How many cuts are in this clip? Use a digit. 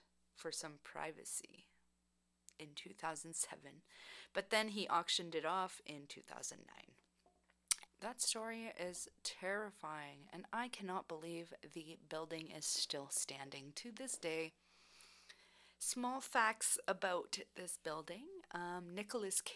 1